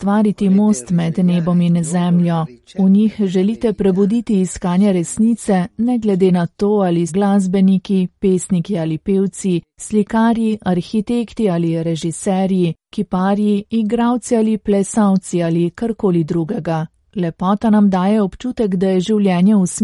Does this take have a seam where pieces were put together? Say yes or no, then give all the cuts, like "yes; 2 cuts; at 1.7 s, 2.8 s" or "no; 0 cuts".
yes; 2 cuts; at 7.1 s, 17.0 s